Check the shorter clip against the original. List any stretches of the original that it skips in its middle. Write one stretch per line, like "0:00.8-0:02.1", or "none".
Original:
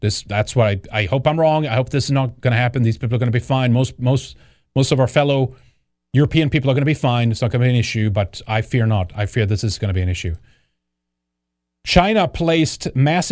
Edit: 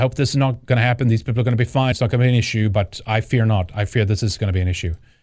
0:03.7-0:07.3